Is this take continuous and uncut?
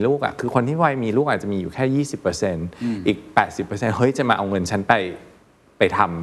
yes; 0 cuts

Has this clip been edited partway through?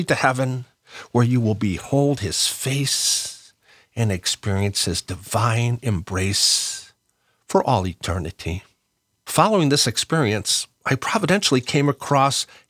no; 0 cuts

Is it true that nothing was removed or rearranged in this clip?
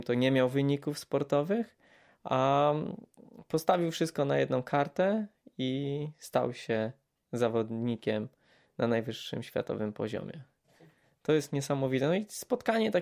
yes; 0 cuts

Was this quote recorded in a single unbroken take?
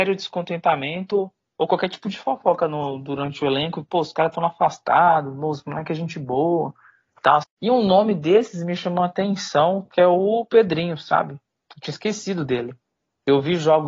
no; 1 cut; at 7.4 s

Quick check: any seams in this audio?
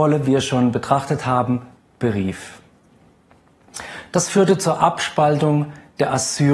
no; 0 cuts

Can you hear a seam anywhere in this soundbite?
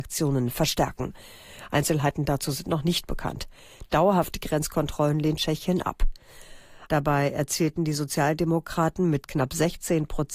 yes; 1 cut; at 6.9 s

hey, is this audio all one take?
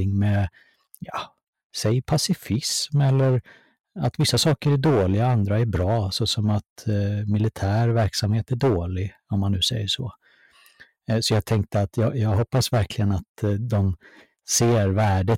yes; 0 cuts

